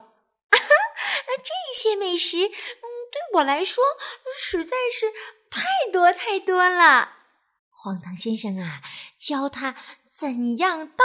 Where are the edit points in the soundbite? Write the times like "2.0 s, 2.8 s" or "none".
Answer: 7.6 s